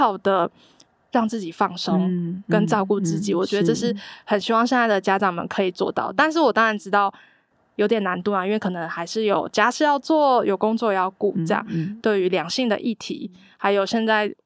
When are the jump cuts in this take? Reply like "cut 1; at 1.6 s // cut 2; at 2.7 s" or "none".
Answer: cut 1; at 12.0 s